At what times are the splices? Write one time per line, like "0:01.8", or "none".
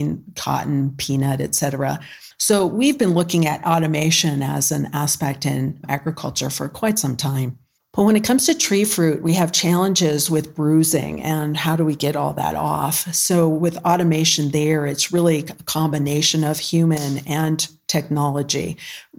0:02.3
0:07.8